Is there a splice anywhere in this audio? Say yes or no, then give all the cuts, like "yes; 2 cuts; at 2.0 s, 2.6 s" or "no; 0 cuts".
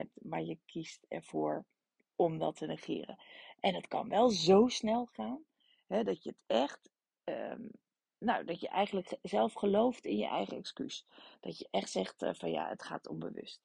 no; 0 cuts